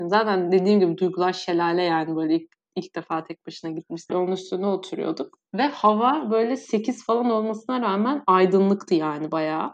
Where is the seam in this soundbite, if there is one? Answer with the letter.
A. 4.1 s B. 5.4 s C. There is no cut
A